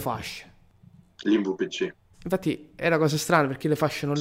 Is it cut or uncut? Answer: cut